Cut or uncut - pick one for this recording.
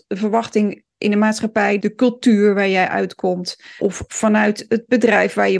cut